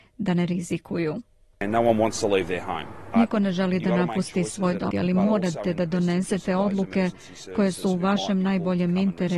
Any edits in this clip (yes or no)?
yes